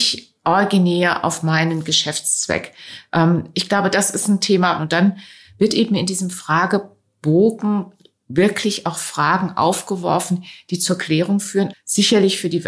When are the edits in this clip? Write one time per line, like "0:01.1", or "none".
0:04.8
0:11.7